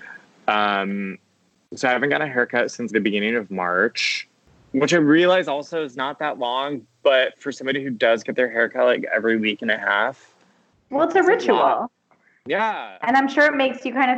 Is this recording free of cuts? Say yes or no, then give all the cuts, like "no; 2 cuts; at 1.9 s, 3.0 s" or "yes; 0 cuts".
no; 1 cut; at 2.9 s